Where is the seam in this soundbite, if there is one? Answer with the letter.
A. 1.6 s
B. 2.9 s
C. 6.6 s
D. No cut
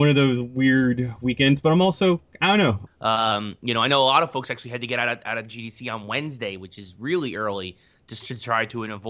B